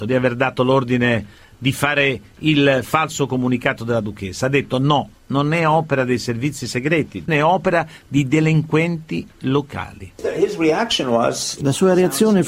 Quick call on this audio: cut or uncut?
cut